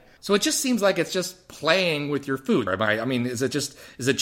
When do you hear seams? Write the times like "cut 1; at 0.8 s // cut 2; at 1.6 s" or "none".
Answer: cut 1; at 2.7 s